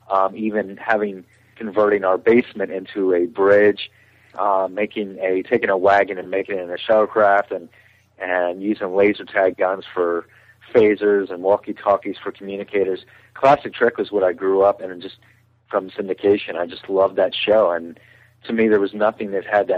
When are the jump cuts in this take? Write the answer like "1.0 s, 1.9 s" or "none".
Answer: none